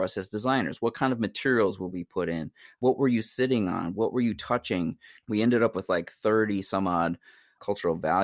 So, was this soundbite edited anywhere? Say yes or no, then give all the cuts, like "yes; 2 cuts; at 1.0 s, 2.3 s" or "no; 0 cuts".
yes; 1 cut; at 5.2 s